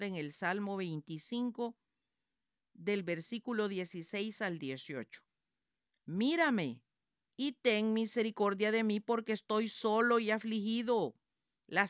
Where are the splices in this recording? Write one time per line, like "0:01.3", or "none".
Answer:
none